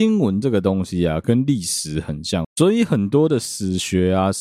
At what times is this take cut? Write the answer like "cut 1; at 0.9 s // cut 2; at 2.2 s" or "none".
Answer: cut 1; at 2.4 s